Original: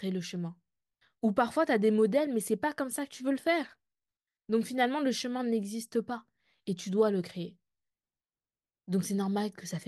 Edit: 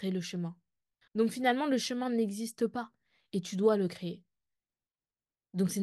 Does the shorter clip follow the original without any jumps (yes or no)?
no